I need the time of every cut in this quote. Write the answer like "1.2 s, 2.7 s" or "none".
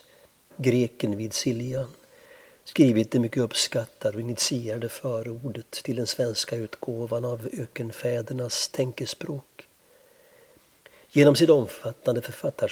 none

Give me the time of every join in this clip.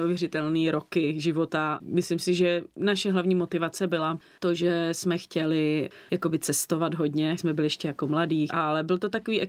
7.4 s, 8.5 s

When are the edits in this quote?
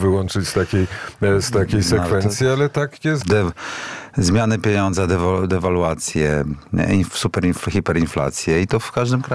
3.2 s

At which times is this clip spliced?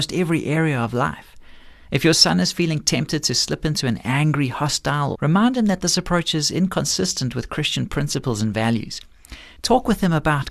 1.8 s, 5.1 s

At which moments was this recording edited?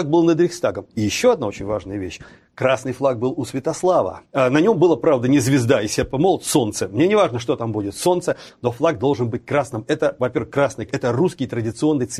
4.3 s, 10.9 s

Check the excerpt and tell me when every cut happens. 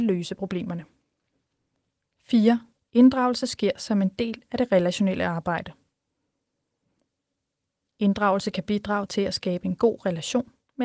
2.8 s

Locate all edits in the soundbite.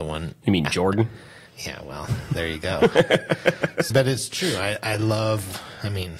3.9 s

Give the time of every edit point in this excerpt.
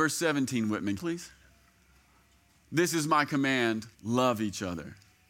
1.0 s, 3.9 s

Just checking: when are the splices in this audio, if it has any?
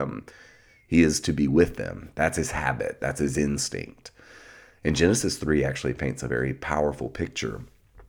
none

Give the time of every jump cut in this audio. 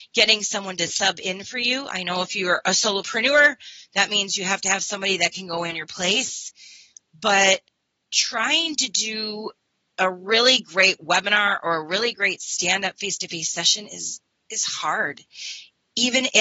none

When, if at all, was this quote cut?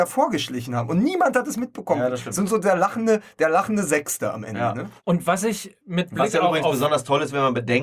5.0 s

